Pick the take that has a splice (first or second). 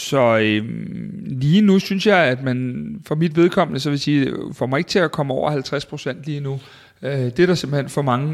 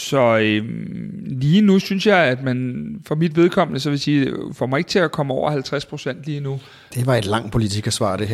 second